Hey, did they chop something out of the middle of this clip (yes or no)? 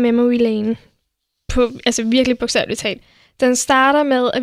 no